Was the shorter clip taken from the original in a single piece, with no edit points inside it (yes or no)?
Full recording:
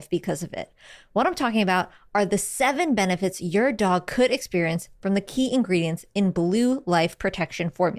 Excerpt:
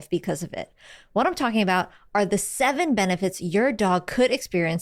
yes